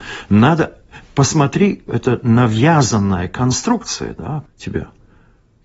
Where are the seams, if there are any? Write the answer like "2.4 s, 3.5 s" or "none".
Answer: 1.9 s, 4.5 s